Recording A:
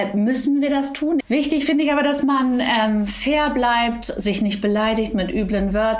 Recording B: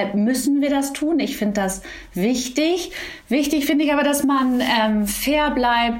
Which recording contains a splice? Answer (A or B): A